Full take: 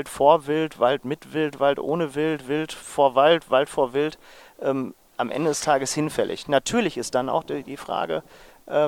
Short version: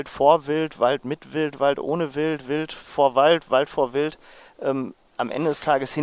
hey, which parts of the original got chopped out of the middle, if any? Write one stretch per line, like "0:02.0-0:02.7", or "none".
none